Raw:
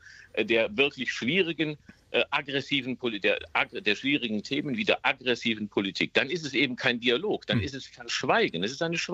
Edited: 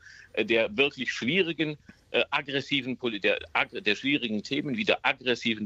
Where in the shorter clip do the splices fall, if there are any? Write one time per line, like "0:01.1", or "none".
none